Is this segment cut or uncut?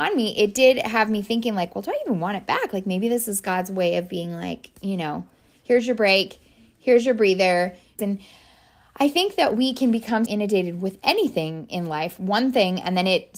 cut